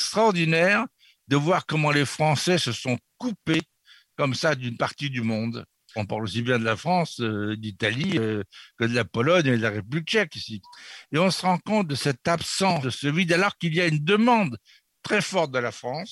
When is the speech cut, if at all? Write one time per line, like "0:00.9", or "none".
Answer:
0:06.0